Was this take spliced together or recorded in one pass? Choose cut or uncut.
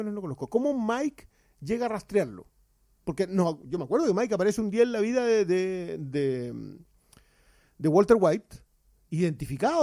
uncut